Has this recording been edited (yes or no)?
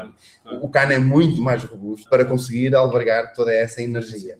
yes